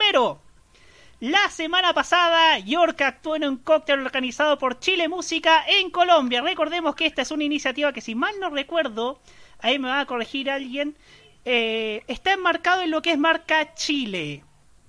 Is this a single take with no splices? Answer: yes; 0 cuts

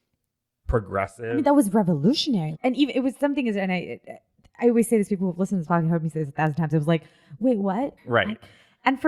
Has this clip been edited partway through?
yes; 2 cuts; at 2.5 s, 8.0 s

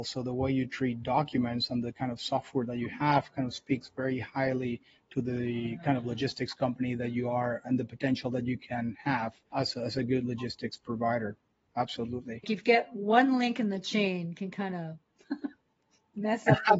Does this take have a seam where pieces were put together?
no; 0 cuts

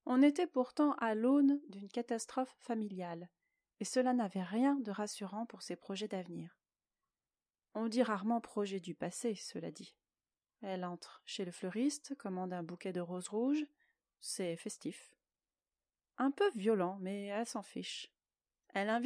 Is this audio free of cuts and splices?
no; 1 cut; at 10.6 s

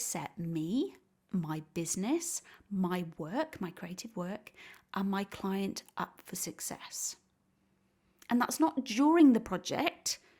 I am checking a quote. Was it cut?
no; 0 cuts

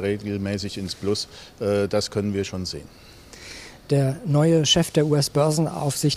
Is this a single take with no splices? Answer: yes; 0 cuts

